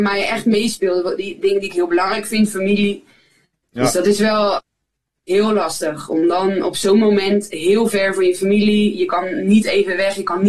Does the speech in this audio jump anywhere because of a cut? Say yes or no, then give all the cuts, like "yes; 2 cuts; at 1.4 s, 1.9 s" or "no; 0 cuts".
no; 0 cuts